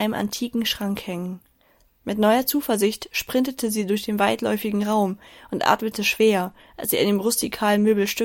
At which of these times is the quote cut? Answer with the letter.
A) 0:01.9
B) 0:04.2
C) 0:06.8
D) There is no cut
A